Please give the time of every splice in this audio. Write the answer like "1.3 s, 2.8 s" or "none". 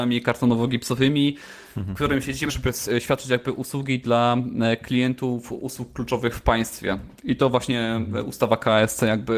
2.5 s